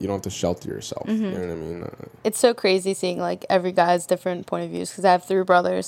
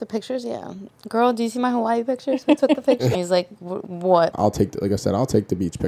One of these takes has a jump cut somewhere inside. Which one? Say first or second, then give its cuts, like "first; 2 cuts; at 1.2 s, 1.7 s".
second; 2 cuts; at 3.2 s, 4.3 s